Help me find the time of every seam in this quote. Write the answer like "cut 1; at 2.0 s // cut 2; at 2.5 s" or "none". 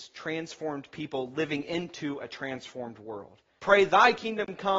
cut 1; at 3.6 s